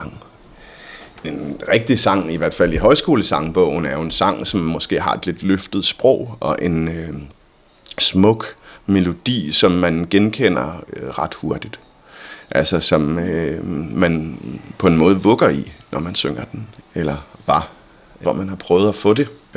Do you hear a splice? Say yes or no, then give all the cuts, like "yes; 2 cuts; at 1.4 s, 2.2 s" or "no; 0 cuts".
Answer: yes; 2 cuts; at 16.8 s, 18.2 s